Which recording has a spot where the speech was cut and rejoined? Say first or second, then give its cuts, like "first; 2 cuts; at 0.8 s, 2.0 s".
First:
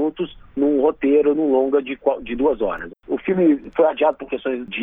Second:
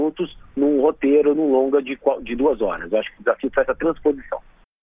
first; 1 cut; at 2.9 s